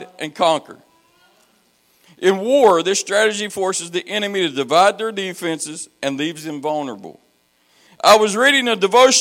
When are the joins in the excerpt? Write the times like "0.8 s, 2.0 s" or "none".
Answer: 7.9 s